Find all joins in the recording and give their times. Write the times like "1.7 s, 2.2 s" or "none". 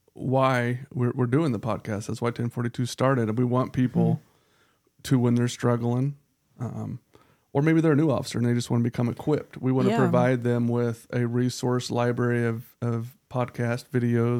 none